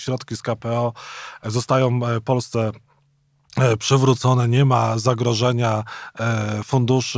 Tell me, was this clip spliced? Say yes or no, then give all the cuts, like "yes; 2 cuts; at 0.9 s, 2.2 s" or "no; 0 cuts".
no; 0 cuts